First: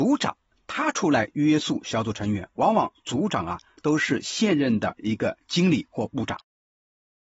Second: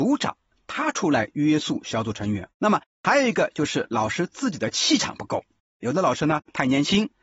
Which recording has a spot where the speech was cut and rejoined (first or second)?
second